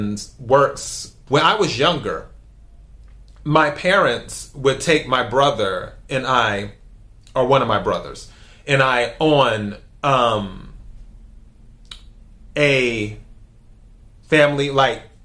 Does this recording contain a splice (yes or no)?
yes